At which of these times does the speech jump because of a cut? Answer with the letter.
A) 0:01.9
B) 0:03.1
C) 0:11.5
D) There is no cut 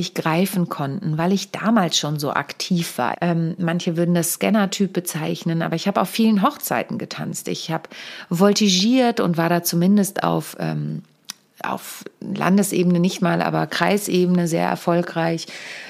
B